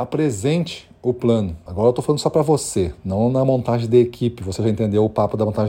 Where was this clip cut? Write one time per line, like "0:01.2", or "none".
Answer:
0:01.7